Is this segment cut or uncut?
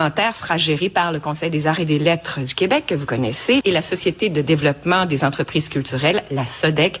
cut